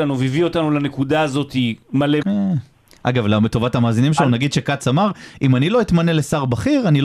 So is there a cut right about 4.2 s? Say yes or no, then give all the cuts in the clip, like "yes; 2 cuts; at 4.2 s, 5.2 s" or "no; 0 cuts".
no; 1 cut; at 2.2 s